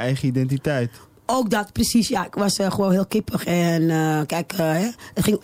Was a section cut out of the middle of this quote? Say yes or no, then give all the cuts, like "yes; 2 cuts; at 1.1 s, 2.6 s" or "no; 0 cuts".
no; 0 cuts